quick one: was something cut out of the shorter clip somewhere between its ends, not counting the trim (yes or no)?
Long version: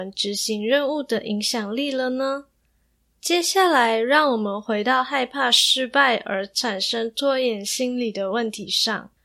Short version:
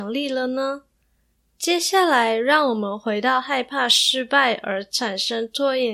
no